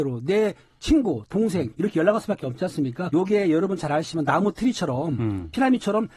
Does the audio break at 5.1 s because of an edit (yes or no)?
no